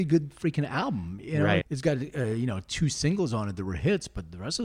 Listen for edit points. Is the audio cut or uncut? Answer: cut